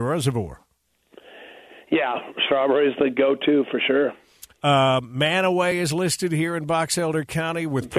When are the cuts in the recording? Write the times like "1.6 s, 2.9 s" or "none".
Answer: none